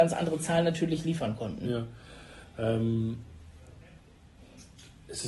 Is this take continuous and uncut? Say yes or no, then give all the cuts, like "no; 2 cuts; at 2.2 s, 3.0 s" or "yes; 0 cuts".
no; 1 cut; at 2.4 s